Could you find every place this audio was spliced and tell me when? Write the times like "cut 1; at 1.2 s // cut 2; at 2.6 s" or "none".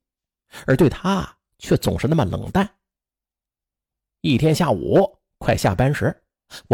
none